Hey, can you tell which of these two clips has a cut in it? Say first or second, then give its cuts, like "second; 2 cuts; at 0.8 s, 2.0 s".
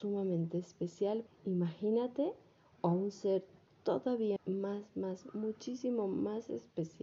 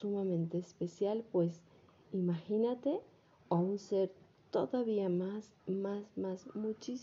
first; 2 cuts; at 1.3 s, 4.4 s